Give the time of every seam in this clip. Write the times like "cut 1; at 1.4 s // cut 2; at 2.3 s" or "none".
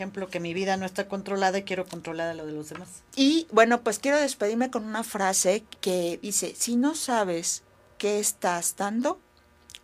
cut 1; at 5.8 s